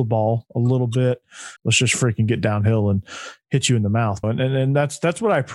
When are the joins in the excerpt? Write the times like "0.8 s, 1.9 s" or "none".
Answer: 1.6 s, 4.2 s